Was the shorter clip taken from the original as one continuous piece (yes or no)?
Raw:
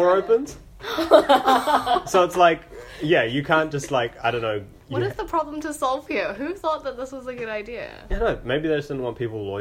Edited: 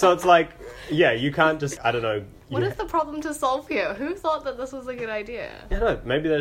no